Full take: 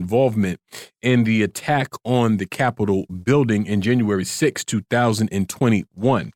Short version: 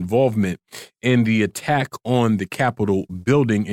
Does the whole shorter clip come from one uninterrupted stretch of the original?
yes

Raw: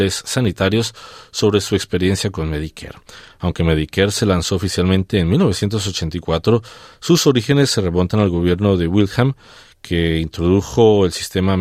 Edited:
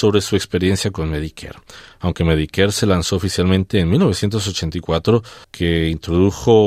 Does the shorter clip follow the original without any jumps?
no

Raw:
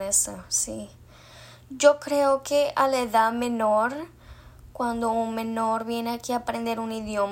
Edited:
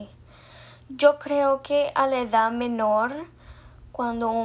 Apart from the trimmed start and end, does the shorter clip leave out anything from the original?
no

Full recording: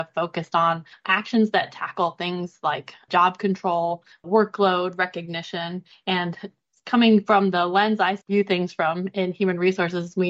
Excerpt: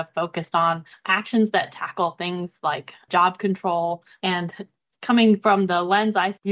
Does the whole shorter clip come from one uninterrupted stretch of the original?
no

